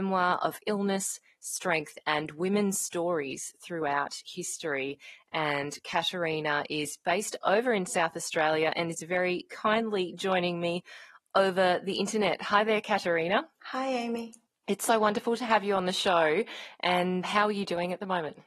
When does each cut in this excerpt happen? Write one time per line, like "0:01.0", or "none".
0:17.2